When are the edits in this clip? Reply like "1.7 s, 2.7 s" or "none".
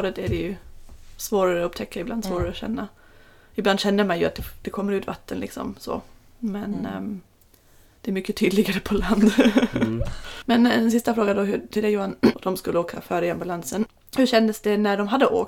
10.4 s, 12.3 s